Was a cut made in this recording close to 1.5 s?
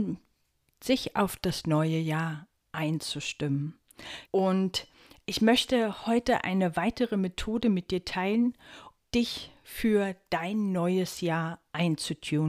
no; 2 cuts; at 4.3 s, 9.0 s

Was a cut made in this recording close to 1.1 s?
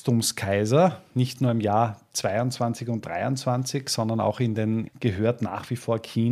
no; 1 cut; at 4.9 s

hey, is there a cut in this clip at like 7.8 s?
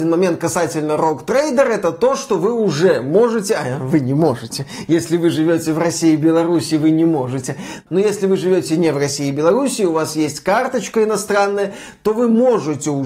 no; 0 cuts

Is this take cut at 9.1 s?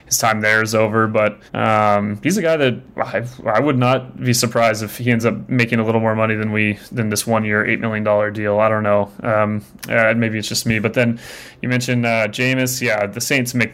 no; 1 cut; at 1.5 s

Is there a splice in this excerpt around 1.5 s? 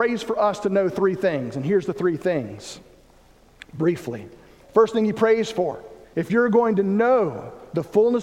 no; 2 cuts; at 4.6 s, 6.0 s

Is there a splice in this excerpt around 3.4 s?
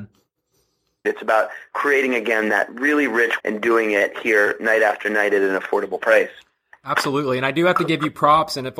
yes; 2 cuts; at 1.0 s, 3.4 s

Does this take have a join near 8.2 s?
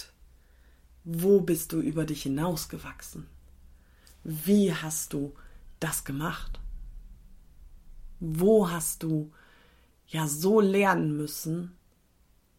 no; 0 cuts

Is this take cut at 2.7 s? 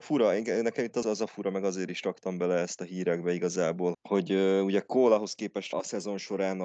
no; 3 cuts; at 1.0 s, 3.9 s, 5.7 s

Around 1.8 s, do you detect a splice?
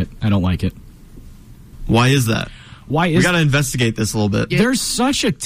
no; 1 cut; at 4.5 s

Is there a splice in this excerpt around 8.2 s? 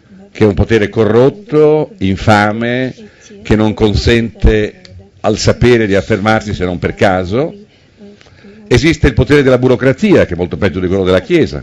no; 0 cuts

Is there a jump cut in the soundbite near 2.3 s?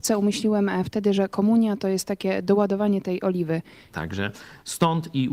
no; 1 cut; at 3.9 s

